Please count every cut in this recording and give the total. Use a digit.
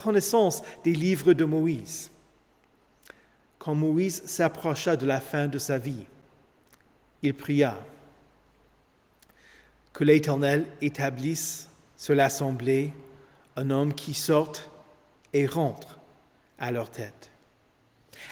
0